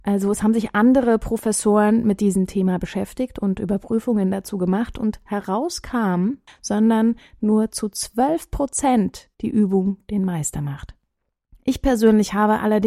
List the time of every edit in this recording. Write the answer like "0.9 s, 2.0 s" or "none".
6.5 s, 9.3 s